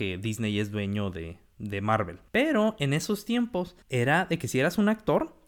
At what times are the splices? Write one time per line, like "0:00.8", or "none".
0:02.3
0:03.8